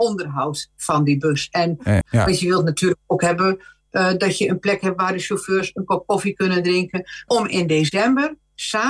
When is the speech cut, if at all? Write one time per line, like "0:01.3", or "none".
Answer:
0:02.0
0:07.3